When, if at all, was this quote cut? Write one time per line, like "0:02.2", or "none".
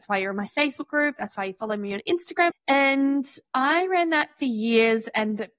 0:02.5